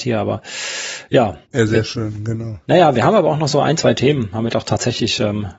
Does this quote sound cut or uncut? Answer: cut